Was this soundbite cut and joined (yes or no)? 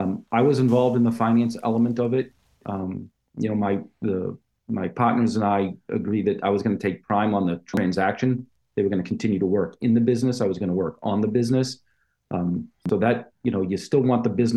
no